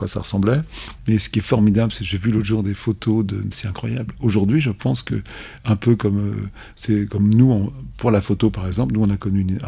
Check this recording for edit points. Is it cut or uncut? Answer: cut